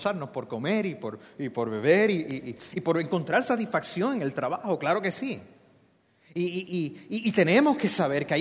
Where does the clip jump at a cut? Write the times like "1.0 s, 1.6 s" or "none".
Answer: none